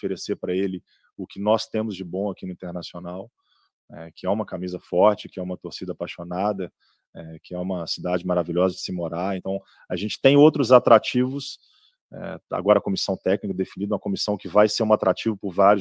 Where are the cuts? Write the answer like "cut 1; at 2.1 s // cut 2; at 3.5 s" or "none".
none